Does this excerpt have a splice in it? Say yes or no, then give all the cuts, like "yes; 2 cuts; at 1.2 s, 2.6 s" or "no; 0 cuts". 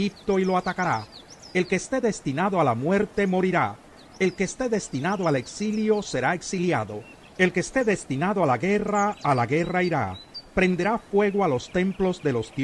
no; 0 cuts